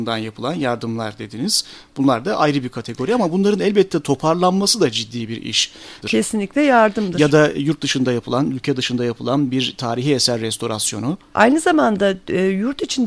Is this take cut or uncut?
cut